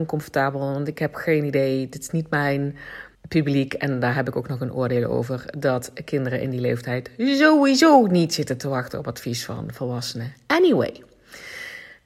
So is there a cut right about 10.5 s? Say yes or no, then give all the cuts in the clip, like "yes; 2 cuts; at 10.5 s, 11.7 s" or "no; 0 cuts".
no; 1 cut; at 3.1 s